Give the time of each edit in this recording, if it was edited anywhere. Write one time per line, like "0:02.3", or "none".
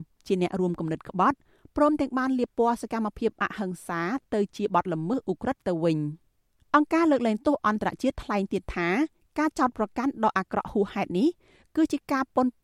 none